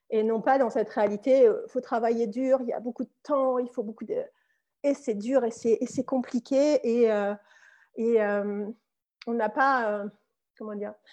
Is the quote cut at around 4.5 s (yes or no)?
no